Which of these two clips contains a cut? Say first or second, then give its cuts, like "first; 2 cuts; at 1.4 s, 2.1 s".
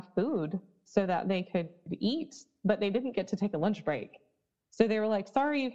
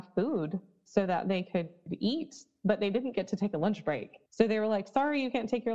second; 1 cut; at 4.3 s